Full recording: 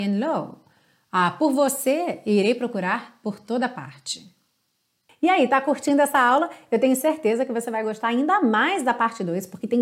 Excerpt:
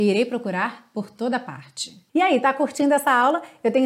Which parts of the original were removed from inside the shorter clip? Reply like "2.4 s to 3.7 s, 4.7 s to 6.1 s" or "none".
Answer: 4.4 s to 5.2 s